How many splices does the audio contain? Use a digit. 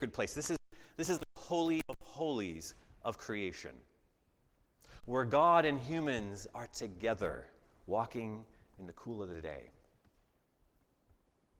2